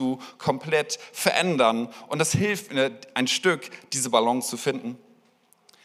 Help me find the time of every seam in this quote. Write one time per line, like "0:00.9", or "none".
none

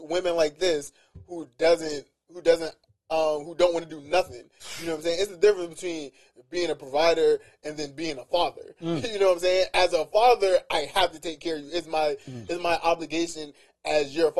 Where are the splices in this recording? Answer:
none

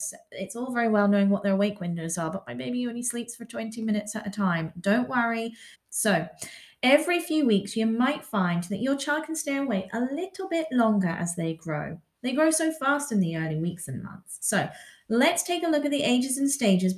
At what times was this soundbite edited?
0:05.7

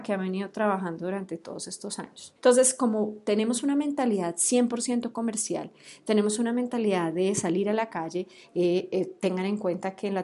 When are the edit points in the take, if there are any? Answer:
0:02.4

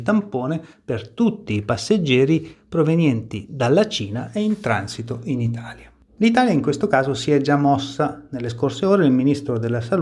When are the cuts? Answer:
0:06.1

